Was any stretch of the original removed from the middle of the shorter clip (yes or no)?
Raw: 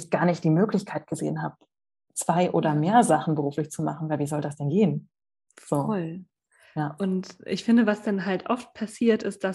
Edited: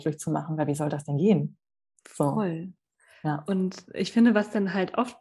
no